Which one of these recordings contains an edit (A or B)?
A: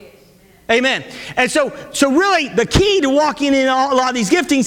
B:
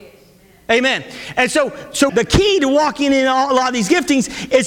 B